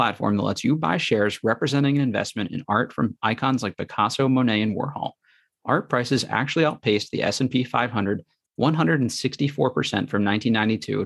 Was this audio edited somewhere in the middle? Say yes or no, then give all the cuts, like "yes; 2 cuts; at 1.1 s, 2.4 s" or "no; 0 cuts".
no; 0 cuts